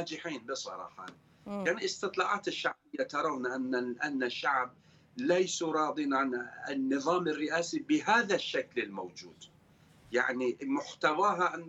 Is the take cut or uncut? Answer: uncut